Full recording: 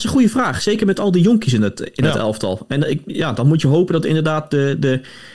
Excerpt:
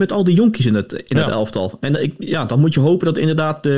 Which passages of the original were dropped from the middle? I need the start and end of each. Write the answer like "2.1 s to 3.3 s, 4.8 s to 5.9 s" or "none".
none